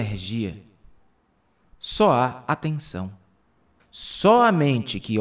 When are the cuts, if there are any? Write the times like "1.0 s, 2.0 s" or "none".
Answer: 1.6 s, 3.8 s